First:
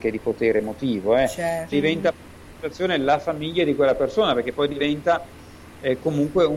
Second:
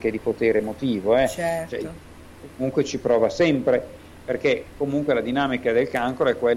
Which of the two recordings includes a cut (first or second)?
first